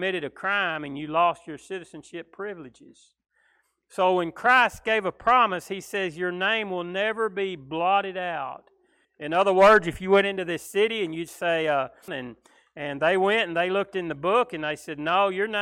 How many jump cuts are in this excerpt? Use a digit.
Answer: 2